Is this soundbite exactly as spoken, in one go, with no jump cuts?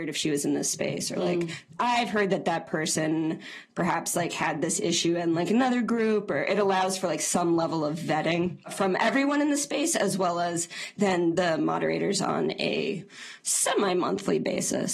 yes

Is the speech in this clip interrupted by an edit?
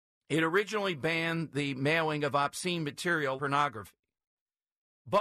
yes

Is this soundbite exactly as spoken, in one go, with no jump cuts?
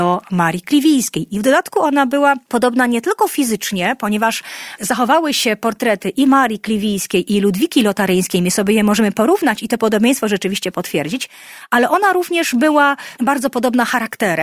yes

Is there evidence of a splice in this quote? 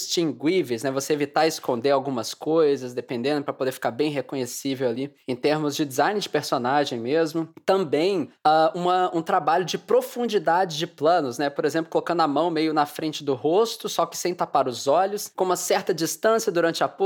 no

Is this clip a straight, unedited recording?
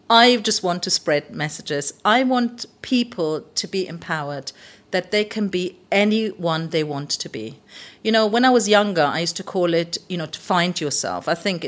yes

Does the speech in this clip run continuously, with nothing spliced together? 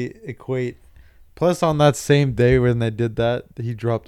yes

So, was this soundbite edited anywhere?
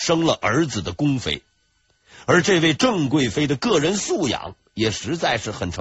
no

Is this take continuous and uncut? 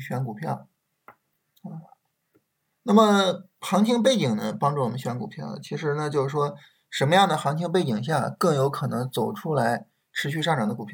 yes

